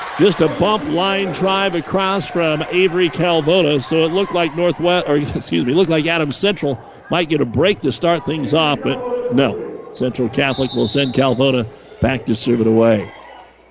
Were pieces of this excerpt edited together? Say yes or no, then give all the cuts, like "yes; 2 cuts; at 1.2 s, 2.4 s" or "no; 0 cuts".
no; 0 cuts